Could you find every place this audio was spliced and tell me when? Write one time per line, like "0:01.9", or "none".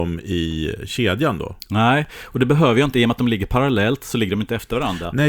none